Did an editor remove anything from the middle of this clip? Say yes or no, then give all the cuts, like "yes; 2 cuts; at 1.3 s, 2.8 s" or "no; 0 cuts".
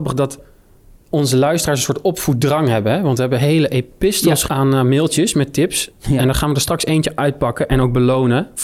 yes; 1 cut; at 4.5 s